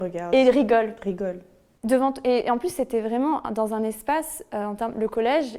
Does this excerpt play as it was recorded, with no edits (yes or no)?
yes